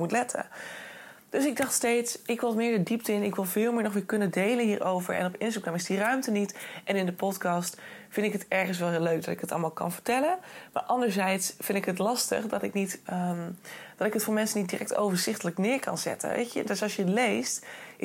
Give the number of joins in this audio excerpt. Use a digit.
1